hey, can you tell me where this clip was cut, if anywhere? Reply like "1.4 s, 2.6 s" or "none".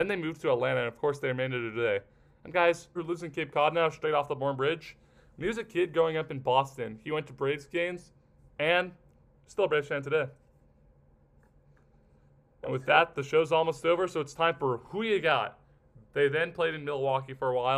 3.0 s, 16.0 s